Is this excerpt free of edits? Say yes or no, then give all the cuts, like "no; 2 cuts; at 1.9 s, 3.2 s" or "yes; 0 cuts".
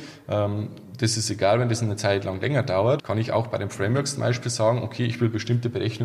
no; 1 cut; at 3.0 s